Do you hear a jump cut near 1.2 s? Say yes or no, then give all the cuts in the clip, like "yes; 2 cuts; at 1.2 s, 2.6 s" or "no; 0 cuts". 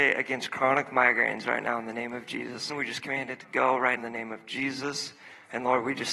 no; 2 cuts; at 2.7 s, 4.0 s